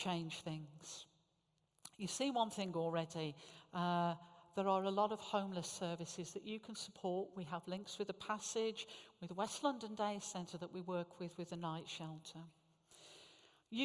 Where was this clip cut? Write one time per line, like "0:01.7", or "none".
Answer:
none